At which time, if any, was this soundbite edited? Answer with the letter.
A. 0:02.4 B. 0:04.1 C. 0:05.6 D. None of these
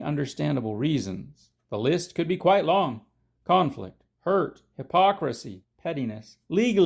C